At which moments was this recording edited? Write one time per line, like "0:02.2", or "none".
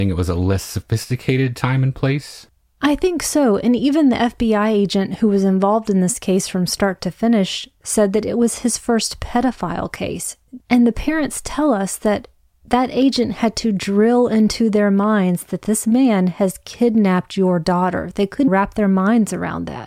0:10.6
0:18.5